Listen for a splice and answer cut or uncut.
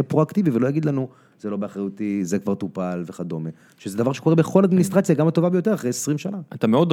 uncut